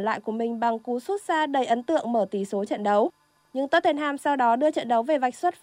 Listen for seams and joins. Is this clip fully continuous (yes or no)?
yes